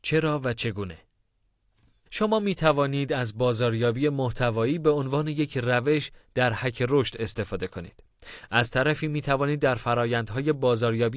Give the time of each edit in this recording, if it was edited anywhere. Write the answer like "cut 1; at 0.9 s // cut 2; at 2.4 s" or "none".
cut 1; at 2.1 s